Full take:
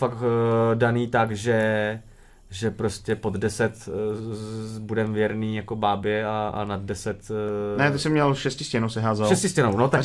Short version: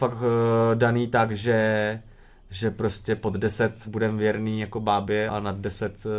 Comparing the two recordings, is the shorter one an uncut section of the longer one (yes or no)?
no